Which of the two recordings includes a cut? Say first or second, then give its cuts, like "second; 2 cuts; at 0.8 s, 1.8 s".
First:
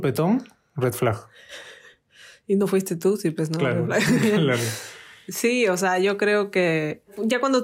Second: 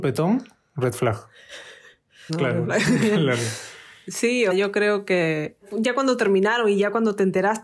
second; 2 cuts; at 2.3 s, 4.5 s